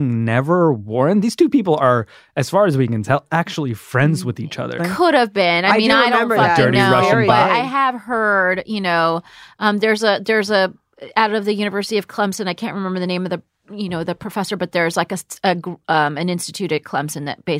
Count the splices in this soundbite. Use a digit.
1